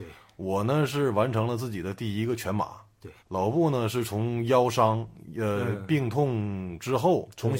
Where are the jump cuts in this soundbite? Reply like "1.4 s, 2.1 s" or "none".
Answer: 3.2 s